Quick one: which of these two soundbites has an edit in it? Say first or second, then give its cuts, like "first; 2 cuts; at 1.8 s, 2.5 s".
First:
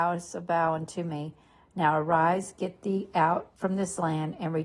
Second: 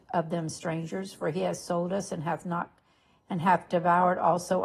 second; 1 cut; at 3.7 s